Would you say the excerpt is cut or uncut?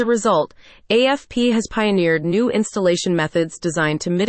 uncut